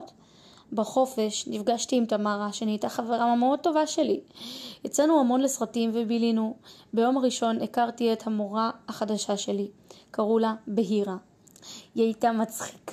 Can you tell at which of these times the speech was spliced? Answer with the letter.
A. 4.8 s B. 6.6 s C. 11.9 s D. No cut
D